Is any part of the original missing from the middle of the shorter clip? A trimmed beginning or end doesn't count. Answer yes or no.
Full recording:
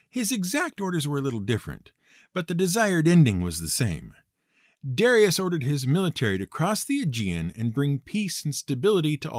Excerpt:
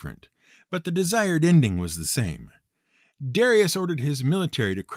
no